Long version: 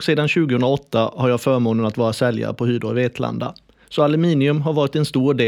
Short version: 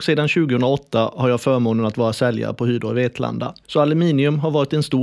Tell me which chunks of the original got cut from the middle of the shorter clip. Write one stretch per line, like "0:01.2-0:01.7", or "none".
0:03.6-0:03.9